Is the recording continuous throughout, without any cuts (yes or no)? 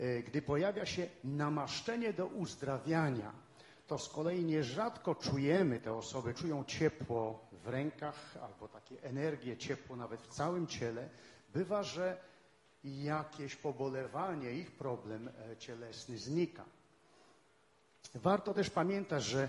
no